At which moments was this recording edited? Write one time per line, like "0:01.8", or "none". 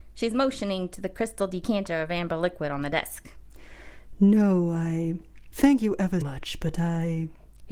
0:06.2

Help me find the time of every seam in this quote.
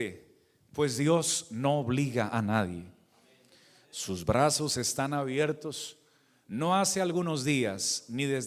none

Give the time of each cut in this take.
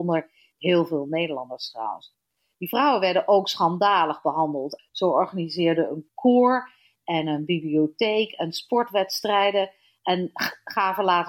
0:04.8

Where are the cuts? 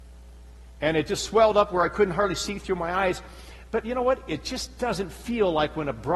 none

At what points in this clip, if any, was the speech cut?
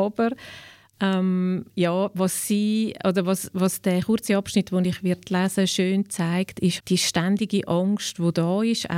0:06.8

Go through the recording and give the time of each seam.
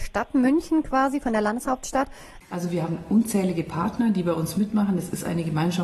0:02.4

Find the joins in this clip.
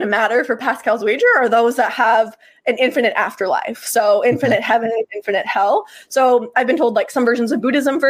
0:06.5

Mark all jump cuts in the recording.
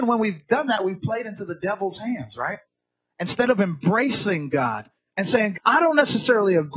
0:05.5

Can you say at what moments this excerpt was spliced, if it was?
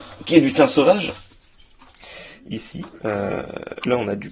none

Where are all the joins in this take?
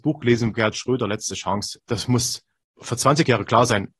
0:01.8

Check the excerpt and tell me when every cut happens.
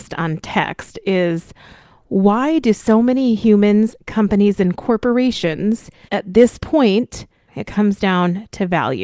0:06.1
0:07.5

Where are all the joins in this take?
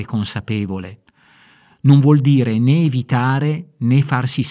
none

